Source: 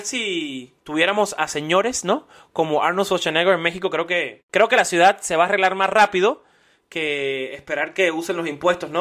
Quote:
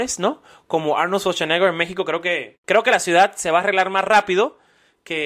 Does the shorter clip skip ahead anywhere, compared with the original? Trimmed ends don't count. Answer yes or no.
no